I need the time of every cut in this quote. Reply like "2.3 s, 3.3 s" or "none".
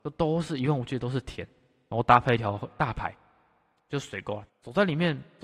4.5 s